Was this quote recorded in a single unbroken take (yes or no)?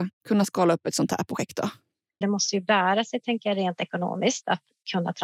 no